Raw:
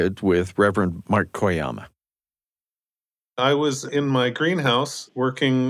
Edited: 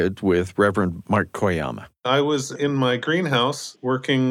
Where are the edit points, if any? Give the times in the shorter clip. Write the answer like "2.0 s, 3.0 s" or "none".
2.0 s